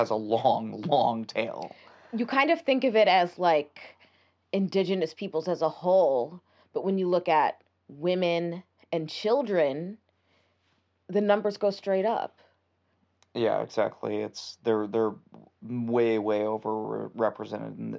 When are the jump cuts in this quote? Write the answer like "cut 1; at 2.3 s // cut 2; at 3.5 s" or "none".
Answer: none

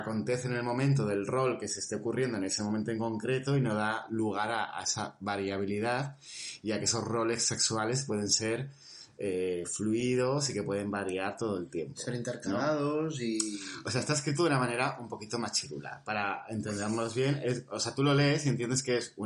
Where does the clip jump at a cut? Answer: none

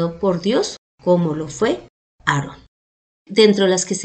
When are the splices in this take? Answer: cut 1; at 3.1 s

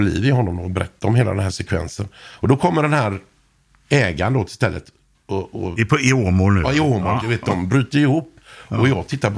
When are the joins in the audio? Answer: cut 1; at 7.2 s

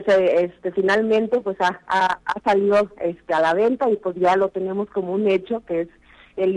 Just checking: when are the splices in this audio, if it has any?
none

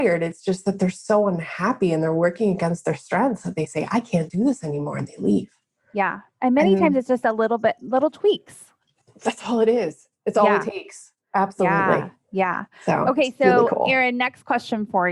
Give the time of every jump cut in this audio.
none

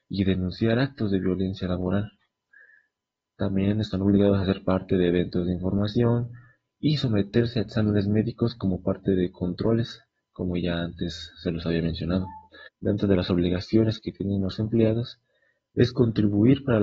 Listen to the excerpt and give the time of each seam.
cut 1; at 12.7 s

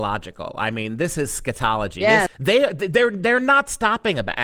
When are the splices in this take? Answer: cut 1; at 2.3 s

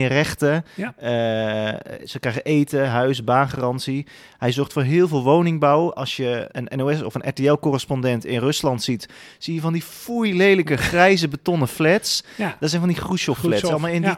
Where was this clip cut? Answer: cut 1; at 6.5 s

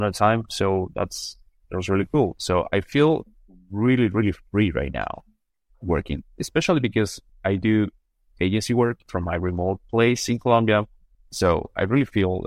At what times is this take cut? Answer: cut 1; at 7.3 s // cut 2; at 11.1 s

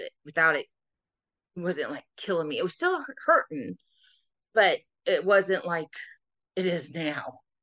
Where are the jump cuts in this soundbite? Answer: none

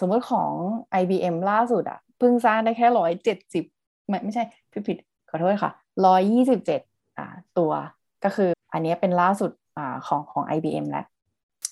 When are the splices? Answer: cut 1; at 8.5 s

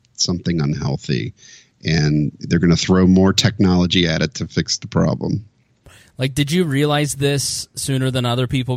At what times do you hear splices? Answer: none

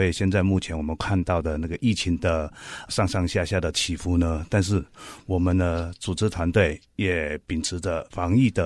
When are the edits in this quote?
none

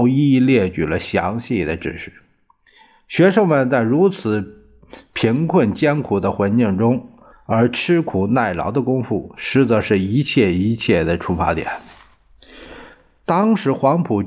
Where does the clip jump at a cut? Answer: cut 1; at 7.3 s

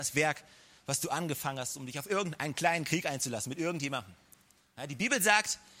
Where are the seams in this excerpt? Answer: none

